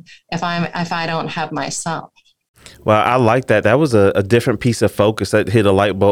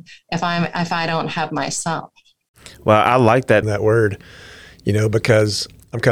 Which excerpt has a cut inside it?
second; 1 cut; at 3.6 s

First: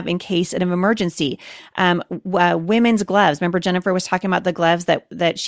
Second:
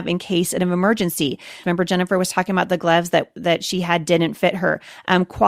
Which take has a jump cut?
second; 1 cut; at 1.6 s

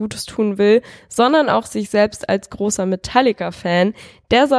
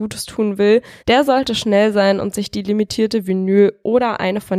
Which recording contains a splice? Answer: second; 1 cut; at 1.0 s

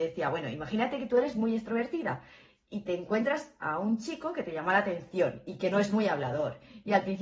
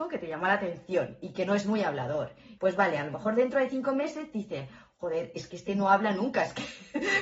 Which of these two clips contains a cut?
second; 1 cut; at 2.6 s

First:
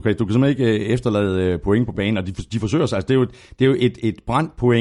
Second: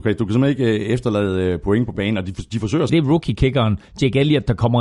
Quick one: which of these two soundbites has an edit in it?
second; 1 cut; at 2.9 s

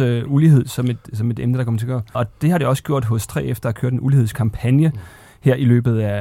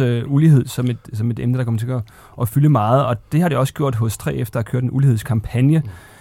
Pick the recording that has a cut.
first; 1 cut; at 2.1 s

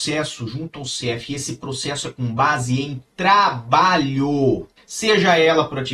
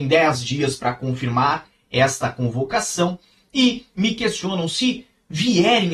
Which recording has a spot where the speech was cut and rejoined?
first; 1 cut; at 4.8 s

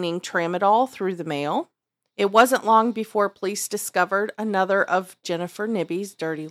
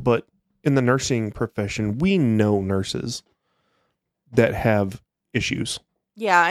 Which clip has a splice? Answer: first; 1 cut; at 2.1 s

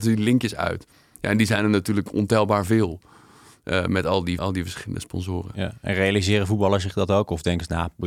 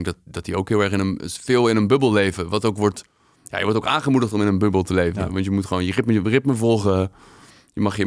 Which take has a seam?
first; 1 cut; at 4.4 s

